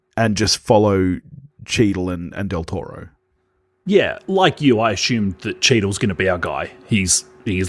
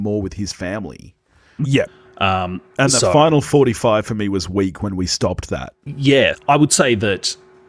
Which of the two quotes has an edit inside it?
second; 2 cuts; at 1.6 s, 6.3 s

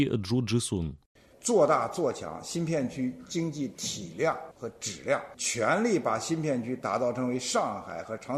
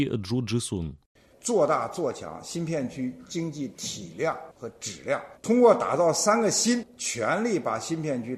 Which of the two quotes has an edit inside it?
first; 1 cut; at 5.3 s

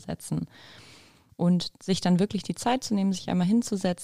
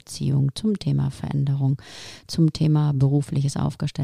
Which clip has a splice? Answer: first; 1 cut; at 1.3 s

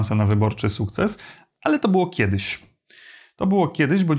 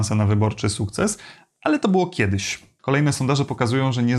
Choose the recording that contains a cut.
second; 1 cut; at 2.8 s

